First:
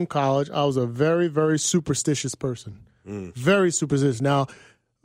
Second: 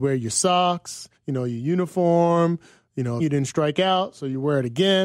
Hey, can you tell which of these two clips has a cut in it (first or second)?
second